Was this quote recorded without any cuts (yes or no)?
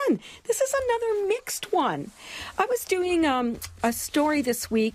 yes